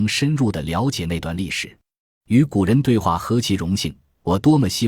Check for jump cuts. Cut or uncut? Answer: cut